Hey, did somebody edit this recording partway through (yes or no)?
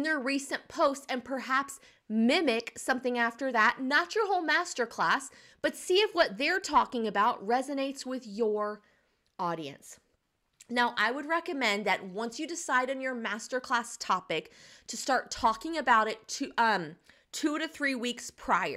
no